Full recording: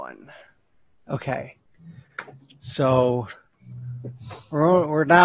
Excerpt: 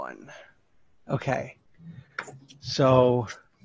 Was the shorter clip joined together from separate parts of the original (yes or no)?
no